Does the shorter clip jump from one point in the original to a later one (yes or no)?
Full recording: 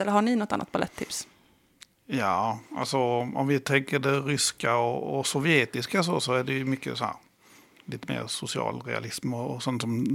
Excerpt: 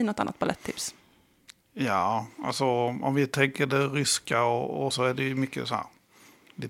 yes